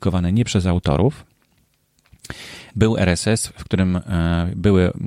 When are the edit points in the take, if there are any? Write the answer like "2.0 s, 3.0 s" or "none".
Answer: 2.7 s